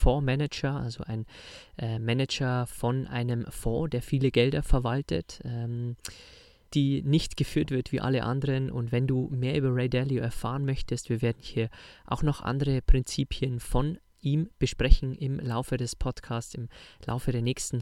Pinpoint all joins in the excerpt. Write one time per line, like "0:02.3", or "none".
0:06.7